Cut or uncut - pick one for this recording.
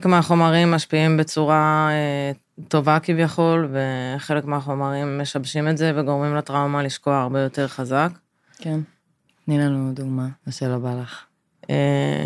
cut